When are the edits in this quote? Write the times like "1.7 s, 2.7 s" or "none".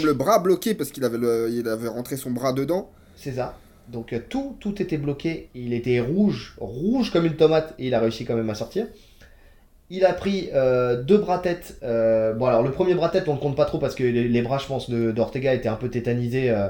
none